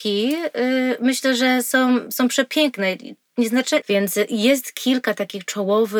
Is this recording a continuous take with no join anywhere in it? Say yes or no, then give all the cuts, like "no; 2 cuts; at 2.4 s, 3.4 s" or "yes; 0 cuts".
no; 1 cut; at 3.8 s